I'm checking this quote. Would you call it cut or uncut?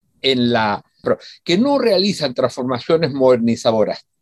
cut